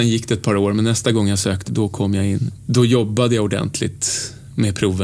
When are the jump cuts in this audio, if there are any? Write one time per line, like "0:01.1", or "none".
0:01.7